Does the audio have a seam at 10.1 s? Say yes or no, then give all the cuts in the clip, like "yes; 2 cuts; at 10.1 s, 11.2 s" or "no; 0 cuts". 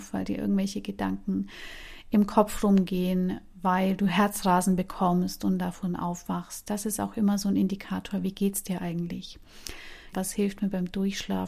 yes; 1 cut; at 10.1 s